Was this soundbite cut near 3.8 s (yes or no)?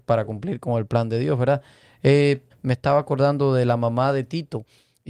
no